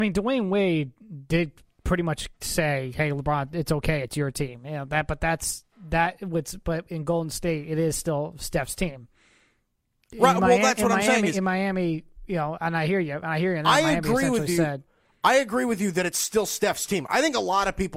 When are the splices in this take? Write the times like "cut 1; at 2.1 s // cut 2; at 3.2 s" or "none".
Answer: none